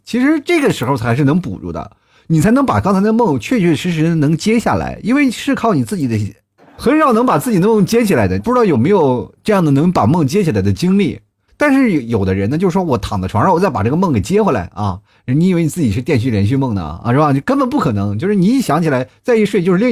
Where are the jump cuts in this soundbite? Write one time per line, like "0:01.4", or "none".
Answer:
0:06.6
0:08.4
0:11.5

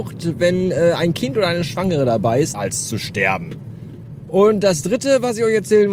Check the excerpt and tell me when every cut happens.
0:02.5
0:04.2

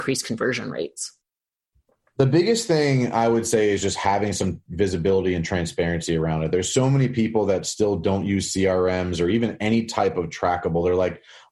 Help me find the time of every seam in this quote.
none

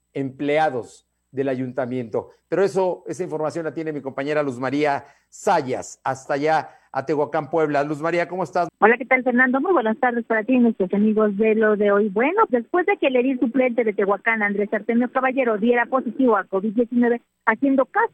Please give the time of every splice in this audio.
0:08.7
0:12.5

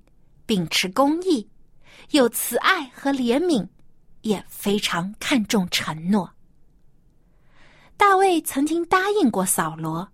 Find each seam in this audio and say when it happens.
none

